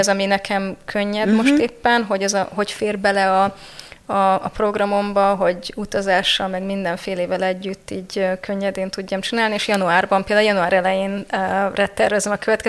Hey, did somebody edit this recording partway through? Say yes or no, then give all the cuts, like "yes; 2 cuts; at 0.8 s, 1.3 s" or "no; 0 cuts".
no; 0 cuts